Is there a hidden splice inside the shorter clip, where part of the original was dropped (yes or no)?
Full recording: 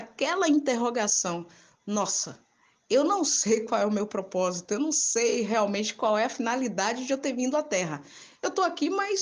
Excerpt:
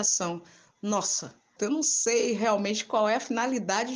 yes